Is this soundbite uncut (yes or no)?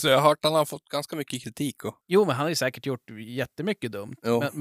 no